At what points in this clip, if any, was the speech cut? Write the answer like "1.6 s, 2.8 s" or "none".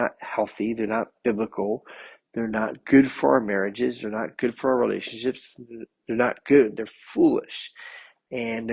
none